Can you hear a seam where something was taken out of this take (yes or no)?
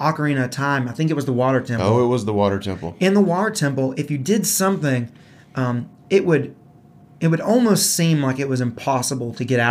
no